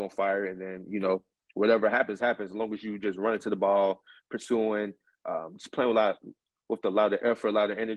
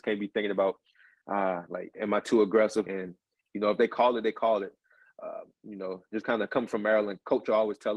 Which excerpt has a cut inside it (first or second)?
second